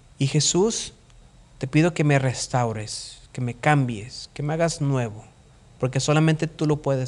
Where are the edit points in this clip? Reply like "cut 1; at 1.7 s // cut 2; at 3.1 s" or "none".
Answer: none